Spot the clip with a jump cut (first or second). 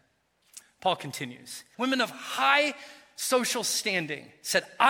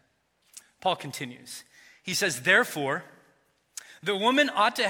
first